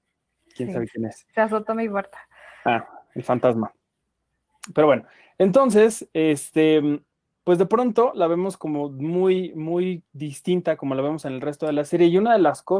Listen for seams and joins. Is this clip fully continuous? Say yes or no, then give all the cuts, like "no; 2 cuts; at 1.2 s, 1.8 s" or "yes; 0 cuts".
yes; 0 cuts